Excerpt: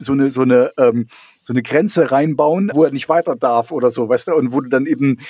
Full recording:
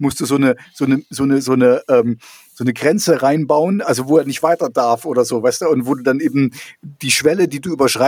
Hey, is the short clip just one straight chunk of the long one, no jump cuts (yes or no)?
no